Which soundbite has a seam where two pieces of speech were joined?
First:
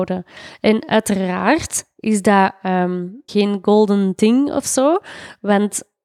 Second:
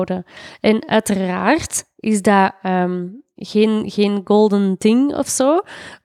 first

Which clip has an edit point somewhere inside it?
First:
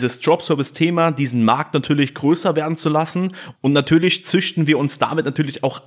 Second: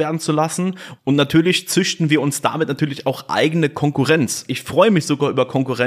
second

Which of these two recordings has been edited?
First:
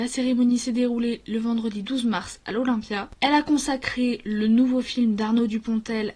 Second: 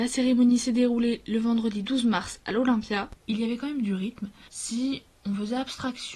second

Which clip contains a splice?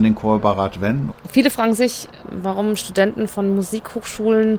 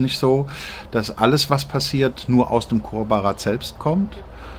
first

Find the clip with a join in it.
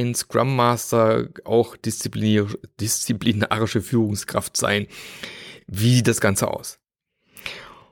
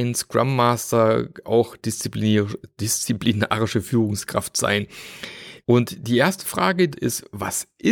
second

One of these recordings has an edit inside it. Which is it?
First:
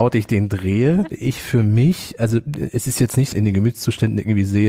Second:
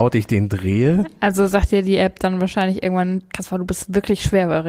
first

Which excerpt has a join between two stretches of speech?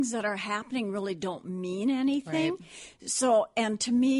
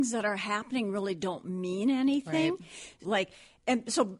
second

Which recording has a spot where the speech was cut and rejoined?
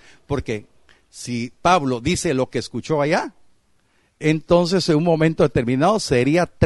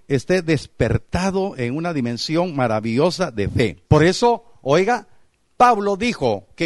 second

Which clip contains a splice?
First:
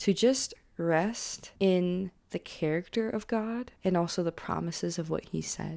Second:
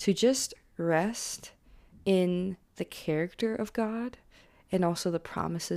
first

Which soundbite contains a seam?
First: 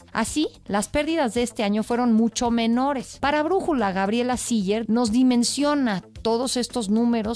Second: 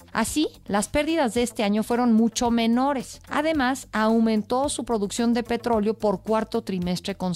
first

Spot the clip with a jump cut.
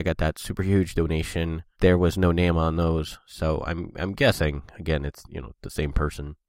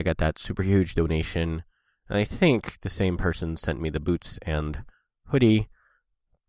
first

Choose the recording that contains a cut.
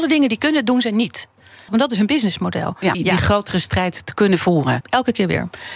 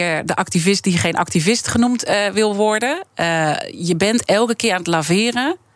first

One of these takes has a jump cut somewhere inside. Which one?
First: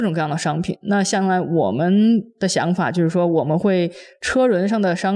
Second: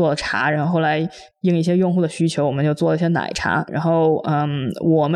second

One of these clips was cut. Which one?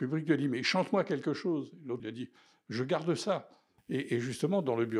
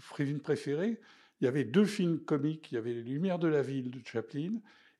first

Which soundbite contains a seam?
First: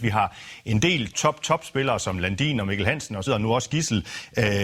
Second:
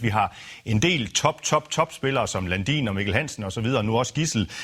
first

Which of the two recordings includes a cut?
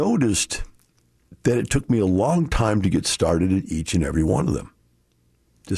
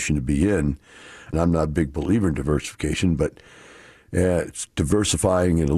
second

